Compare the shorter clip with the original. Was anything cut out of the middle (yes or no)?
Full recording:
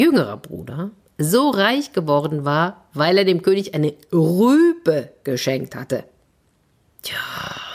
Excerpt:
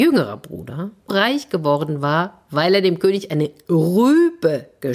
yes